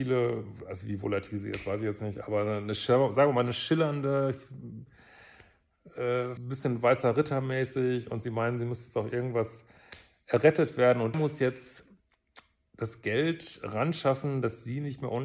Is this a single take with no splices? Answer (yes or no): no